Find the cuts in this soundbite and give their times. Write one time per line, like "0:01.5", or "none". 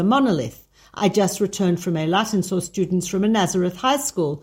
none